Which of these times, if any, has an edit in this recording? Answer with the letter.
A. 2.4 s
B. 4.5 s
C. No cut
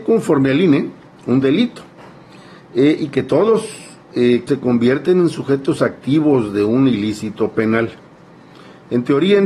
B